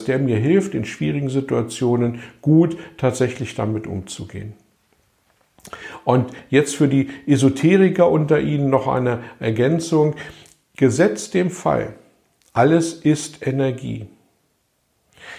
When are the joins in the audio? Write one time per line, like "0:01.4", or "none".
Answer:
none